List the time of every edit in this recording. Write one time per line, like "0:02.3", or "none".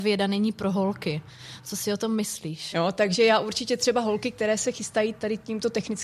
0:02.7
0:04.7